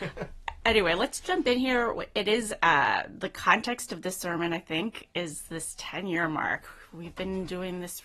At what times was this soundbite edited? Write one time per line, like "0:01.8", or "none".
none

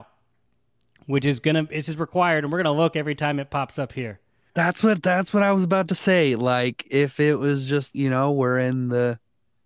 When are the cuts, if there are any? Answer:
0:04.5
0:07.9

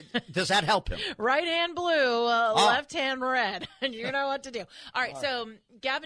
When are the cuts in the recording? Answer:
none

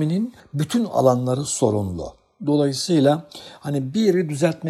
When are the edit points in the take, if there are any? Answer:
none

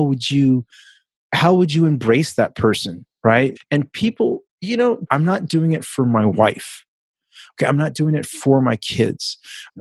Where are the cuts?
0:03.6
0:05.1

